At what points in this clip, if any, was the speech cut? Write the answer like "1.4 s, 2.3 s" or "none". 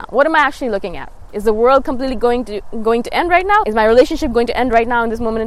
3.6 s